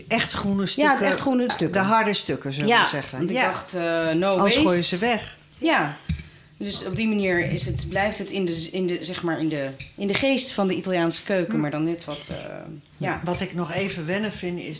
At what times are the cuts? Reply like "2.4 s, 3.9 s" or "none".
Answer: 1.5 s